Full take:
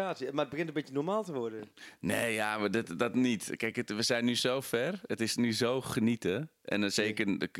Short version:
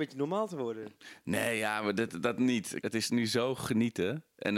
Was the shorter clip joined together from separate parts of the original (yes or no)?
yes